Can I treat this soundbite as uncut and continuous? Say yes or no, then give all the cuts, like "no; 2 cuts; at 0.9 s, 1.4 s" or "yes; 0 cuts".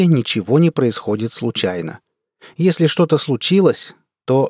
yes; 0 cuts